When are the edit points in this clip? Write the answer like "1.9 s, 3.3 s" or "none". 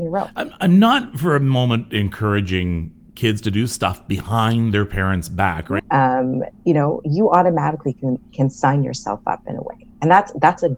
5.8 s